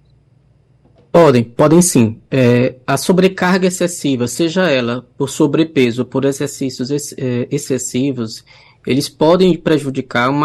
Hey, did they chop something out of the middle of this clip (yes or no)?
no